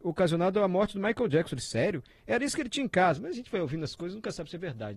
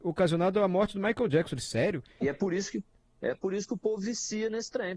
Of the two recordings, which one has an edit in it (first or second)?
second